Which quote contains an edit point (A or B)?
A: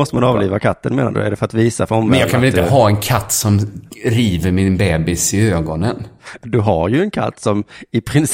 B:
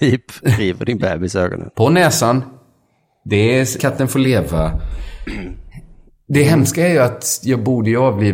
B